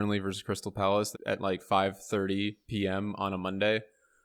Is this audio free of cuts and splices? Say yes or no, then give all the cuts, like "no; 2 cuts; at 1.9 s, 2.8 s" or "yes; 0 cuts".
no; 1 cut; at 1.1 s